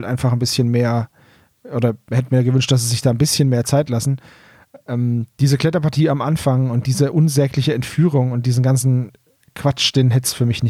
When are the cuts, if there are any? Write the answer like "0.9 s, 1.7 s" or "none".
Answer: none

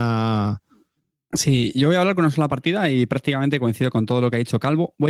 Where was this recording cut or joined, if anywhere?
none

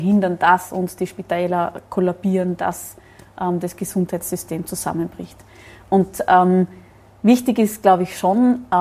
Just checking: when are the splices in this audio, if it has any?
none

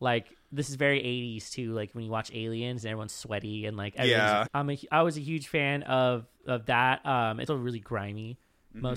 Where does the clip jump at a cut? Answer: 4.5 s, 7.5 s

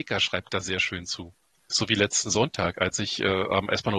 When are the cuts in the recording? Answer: 1.6 s

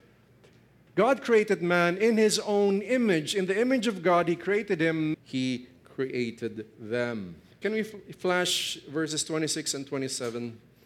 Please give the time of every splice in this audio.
5.1 s, 7.6 s

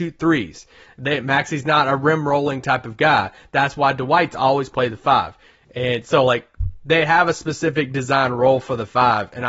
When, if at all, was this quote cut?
none

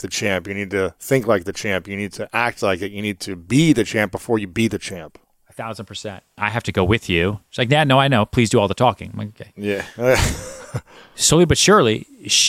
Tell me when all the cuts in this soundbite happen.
6.4 s

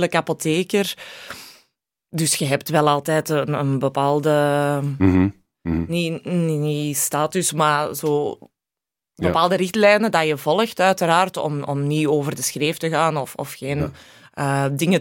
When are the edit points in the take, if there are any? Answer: none

